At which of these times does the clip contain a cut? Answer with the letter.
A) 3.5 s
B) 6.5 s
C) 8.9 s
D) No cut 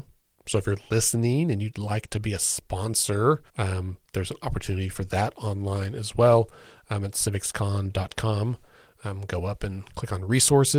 A